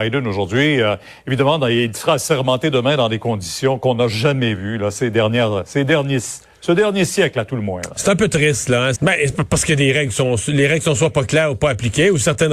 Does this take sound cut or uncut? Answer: cut